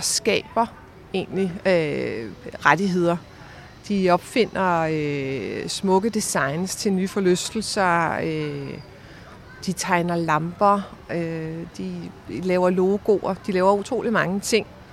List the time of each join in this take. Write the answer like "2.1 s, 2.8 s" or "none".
none